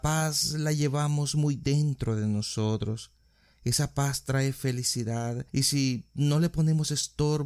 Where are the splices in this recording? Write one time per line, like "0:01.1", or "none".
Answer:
none